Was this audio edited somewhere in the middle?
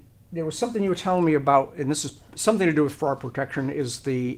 no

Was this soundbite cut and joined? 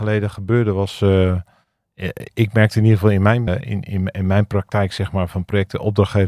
yes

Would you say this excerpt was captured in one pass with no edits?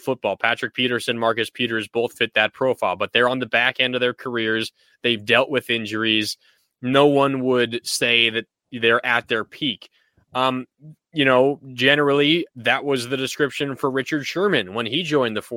yes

